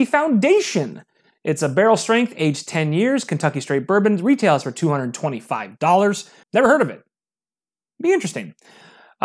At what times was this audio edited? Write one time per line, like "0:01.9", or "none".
0:06.4